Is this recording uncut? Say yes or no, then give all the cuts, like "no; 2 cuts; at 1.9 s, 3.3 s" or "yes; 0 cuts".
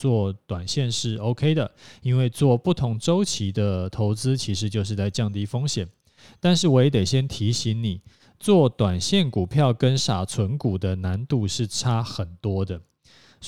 no; 1 cut; at 10.0 s